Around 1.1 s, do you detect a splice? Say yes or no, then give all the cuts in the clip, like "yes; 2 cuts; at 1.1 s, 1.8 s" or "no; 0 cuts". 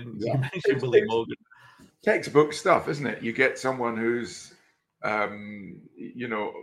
no; 0 cuts